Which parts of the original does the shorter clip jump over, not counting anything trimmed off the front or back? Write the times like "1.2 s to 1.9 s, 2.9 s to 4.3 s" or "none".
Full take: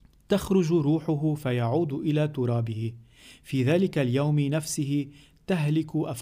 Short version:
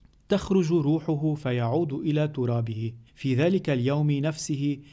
3.1 s to 3.3 s